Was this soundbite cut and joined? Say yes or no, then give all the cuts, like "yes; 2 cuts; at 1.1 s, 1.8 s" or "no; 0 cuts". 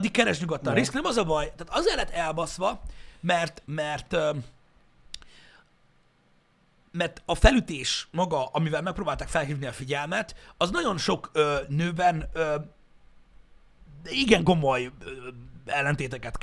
yes; 1 cut; at 3.6 s